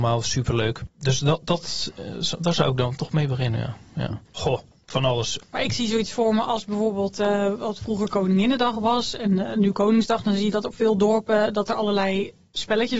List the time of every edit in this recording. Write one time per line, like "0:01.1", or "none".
0:04.2

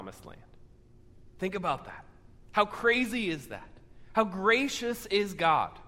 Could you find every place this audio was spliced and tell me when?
none

